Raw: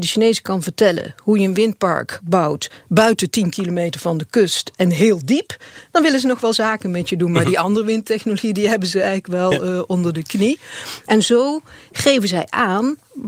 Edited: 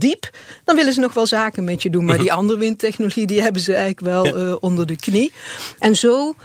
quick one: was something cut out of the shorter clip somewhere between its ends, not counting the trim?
no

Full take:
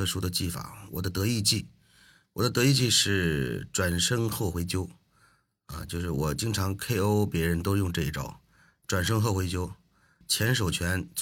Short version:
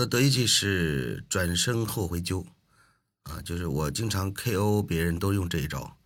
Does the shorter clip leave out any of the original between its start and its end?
no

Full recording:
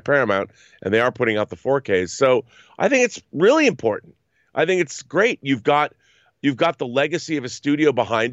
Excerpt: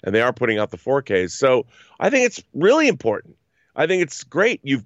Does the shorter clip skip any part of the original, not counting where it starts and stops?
no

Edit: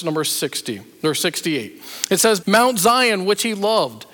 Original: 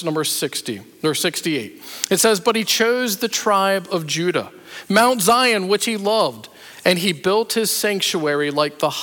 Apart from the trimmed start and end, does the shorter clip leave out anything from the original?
yes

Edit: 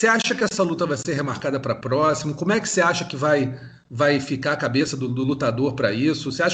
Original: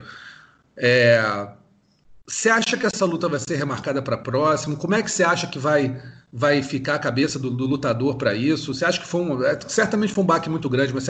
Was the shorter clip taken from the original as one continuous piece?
yes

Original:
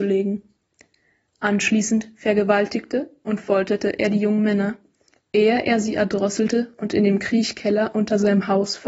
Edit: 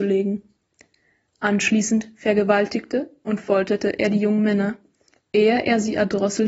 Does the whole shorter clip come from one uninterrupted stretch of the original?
yes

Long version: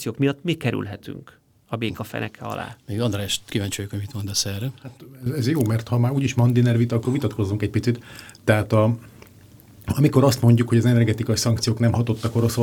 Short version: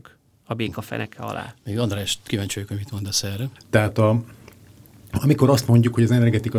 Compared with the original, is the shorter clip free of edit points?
no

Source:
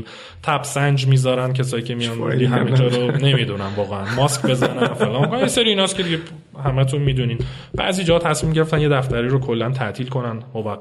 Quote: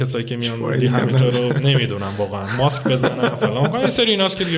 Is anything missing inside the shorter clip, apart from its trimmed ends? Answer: no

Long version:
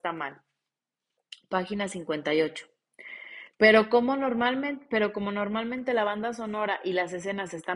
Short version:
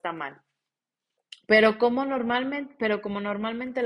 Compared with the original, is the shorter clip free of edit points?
no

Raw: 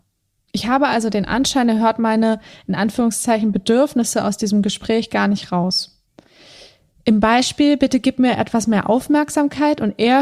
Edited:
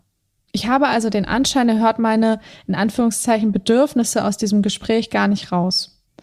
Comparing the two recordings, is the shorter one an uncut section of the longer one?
yes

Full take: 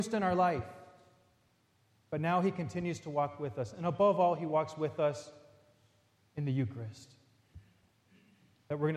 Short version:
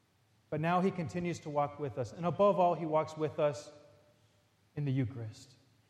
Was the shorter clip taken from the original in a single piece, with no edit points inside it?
yes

